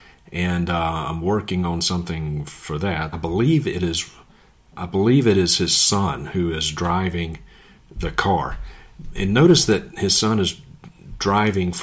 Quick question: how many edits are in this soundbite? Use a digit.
2